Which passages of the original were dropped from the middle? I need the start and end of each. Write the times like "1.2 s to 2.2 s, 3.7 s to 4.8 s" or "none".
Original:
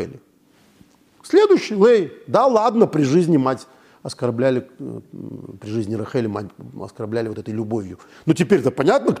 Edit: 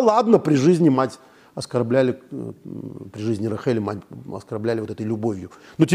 none